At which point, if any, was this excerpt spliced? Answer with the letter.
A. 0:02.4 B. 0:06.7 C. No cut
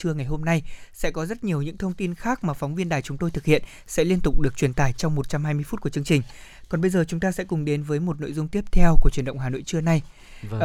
C